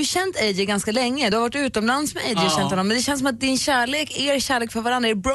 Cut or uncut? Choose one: uncut